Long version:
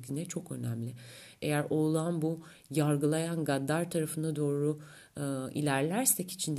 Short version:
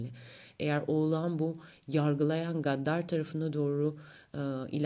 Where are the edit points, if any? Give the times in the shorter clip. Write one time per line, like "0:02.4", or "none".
none